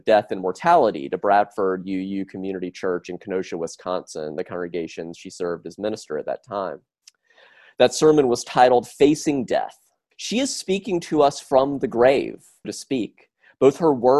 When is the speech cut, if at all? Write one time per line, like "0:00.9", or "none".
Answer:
0:10.1
0:12.6